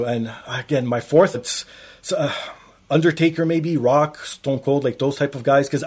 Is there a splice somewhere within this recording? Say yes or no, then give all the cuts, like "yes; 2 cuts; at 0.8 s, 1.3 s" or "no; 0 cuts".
yes; 1 cut; at 1.3 s